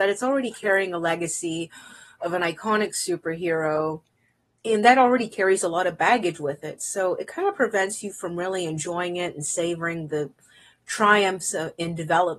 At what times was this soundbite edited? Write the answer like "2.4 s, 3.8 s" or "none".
none